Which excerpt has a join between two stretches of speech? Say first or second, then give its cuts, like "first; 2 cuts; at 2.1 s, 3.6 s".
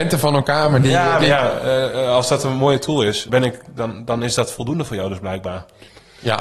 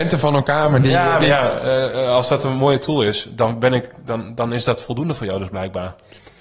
first; 1 cut; at 3.3 s